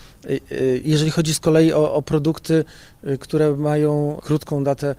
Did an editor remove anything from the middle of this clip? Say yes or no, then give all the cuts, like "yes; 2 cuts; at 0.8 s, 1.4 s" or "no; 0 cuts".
no; 0 cuts